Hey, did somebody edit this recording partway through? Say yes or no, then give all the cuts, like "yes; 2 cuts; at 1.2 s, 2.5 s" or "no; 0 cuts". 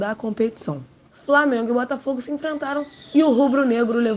yes; 1 cut; at 1.1 s